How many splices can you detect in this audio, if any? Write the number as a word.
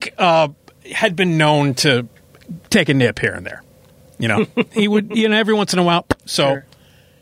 one